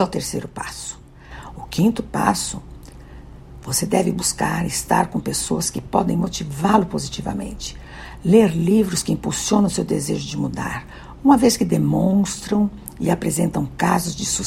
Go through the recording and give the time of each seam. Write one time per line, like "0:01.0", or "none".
0:01.6